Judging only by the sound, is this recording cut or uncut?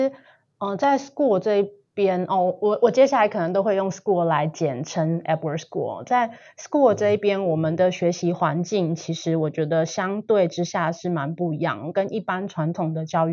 uncut